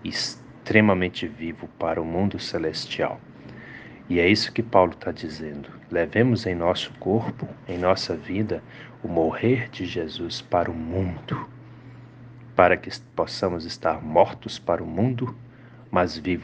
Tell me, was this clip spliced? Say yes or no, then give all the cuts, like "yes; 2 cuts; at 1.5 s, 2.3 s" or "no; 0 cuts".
no; 0 cuts